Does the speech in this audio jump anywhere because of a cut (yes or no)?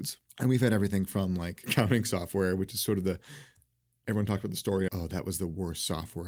yes